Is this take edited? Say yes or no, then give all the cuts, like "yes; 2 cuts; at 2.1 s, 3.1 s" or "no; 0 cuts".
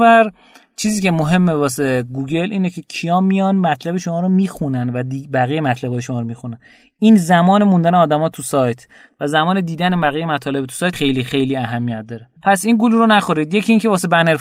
yes; 2 cuts; at 10.9 s, 12.4 s